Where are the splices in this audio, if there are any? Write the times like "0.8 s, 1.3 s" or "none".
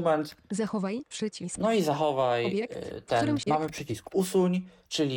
3.5 s